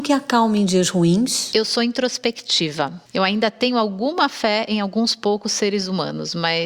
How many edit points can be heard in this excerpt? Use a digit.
1